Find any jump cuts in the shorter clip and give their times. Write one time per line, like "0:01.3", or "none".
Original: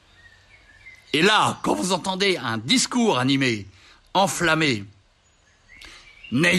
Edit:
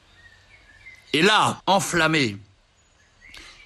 0:01.6